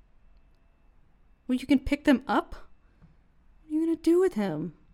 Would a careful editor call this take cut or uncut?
uncut